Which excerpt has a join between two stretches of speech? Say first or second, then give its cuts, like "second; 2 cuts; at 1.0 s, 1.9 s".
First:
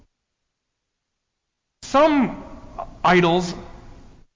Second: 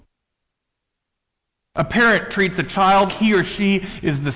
second; 2 cuts; at 1.6 s, 3.1 s